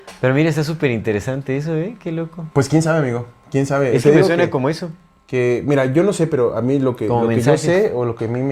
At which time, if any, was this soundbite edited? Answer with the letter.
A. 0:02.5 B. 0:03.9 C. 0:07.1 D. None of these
A